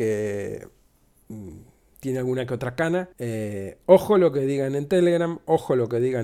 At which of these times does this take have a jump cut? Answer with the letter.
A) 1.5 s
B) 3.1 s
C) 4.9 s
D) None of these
B